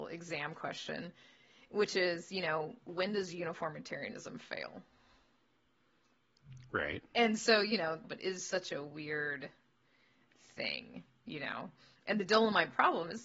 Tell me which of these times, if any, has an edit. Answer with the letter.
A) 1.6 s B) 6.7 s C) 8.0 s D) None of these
C